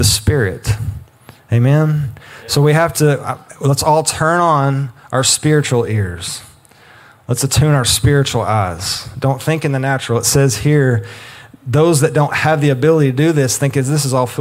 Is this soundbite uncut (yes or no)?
yes